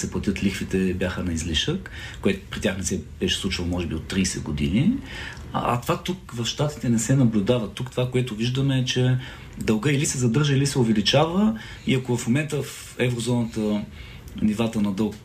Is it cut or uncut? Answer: uncut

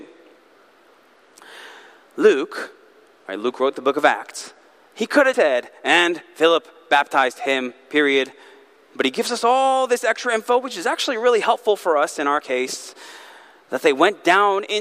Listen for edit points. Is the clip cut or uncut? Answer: cut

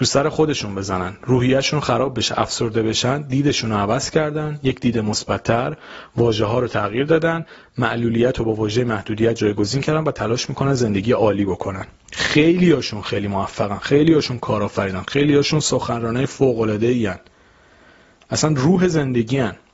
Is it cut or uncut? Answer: uncut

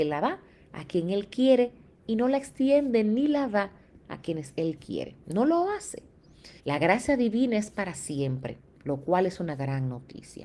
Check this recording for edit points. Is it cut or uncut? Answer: cut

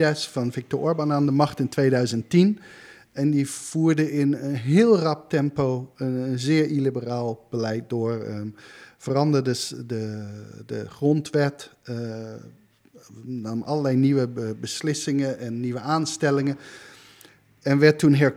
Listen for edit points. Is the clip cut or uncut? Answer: uncut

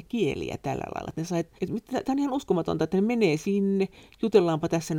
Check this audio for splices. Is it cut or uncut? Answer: cut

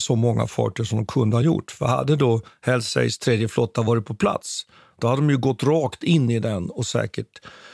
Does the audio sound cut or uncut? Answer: uncut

